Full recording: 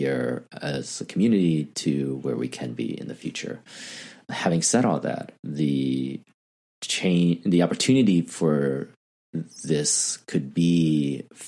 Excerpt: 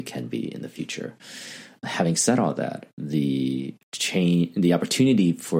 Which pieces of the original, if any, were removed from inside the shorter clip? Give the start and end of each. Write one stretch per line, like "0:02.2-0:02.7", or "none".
0:06.3-0:06.7

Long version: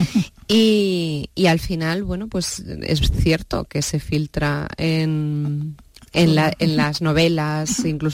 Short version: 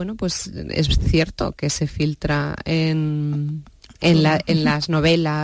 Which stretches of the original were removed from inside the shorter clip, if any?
none

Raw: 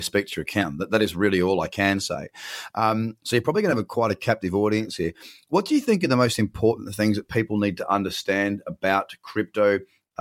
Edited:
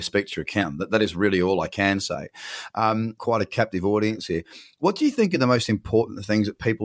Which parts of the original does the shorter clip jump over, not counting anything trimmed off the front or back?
0:03.2-0:03.9

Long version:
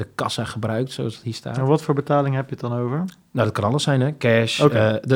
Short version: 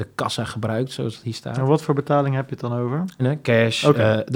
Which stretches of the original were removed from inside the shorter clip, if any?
0:03.2-0:04.0

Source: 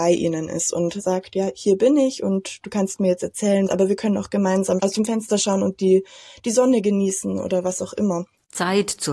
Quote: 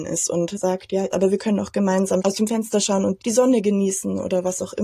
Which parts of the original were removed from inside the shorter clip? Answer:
0:01.5-0:03.7
0:05.8-0:06.4

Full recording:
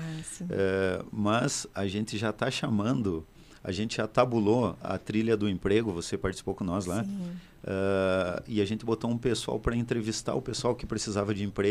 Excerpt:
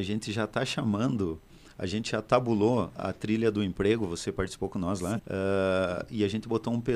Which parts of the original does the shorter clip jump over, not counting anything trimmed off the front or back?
0:07.0-0:07.6

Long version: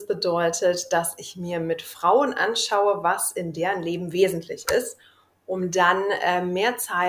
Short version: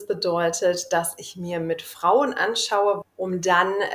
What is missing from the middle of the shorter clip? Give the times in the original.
0:03.0-0:05.3

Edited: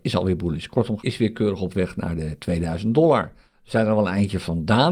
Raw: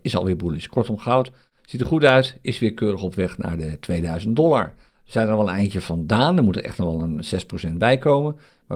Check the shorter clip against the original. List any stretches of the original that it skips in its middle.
0:01.0-0:02.4

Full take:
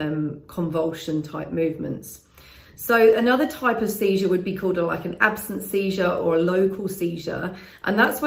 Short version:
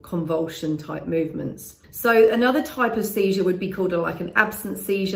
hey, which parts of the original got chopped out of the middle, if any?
0:02.3-0:02.7

